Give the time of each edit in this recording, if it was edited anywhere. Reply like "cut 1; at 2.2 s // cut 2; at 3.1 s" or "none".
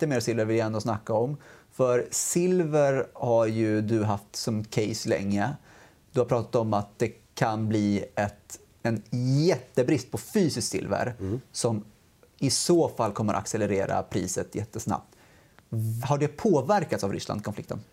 cut 1; at 16.0 s